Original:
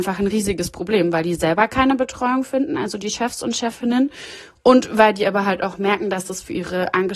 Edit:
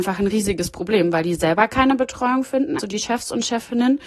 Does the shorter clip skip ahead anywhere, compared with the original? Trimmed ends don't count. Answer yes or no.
yes